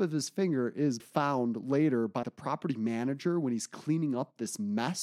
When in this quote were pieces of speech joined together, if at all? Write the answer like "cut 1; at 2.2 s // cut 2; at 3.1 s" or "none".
cut 1; at 1.0 s // cut 2; at 2.2 s